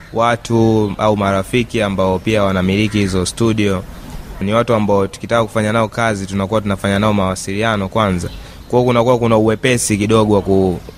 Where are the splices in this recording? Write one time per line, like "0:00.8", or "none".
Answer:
0:04.4